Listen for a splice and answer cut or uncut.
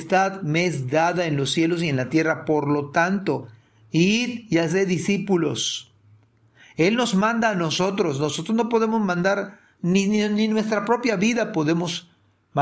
uncut